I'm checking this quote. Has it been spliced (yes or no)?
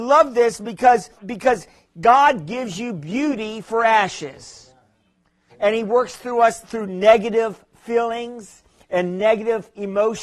yes